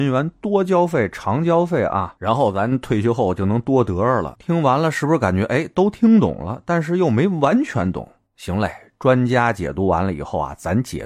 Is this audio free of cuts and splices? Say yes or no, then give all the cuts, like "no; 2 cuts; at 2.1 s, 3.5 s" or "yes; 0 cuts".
no; 1 cut; at 4.3 s